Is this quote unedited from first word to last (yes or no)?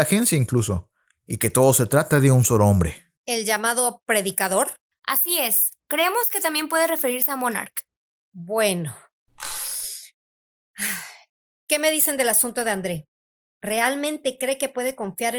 yes